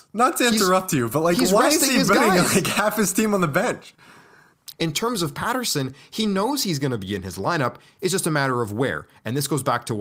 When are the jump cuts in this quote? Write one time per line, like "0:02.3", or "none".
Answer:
0:04.7